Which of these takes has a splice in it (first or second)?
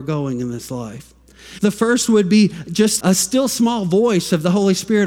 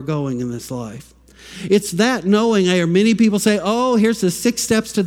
first